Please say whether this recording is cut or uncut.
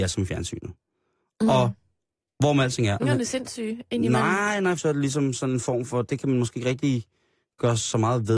cut